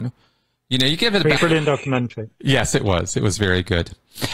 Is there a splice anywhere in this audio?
yes; 1 cut; at 1.4 s

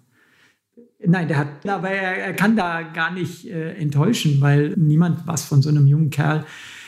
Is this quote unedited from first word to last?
no; 2 cuts; at 1.6 s, 4.7 s

